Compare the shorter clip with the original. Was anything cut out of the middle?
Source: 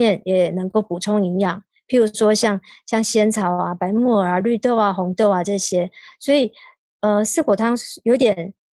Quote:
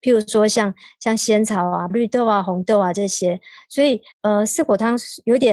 yes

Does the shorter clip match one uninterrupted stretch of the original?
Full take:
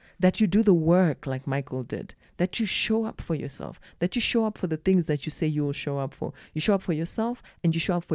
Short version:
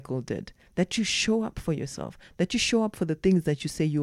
yes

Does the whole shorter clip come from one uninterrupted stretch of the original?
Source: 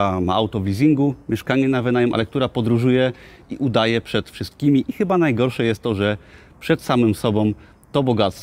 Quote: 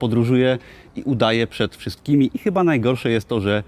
yes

